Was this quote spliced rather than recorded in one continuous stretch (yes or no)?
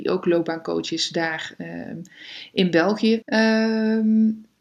yes